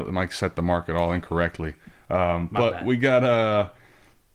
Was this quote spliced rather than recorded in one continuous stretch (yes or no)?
no